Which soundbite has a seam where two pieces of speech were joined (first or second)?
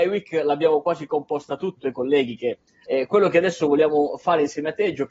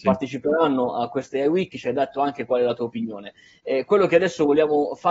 first